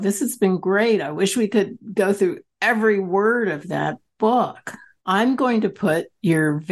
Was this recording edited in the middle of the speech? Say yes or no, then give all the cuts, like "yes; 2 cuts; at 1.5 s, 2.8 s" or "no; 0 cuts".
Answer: yes; 1 cut; at 5.0 s